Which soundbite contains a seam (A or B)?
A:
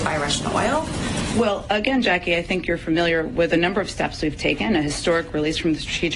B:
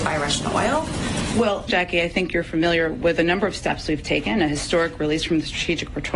B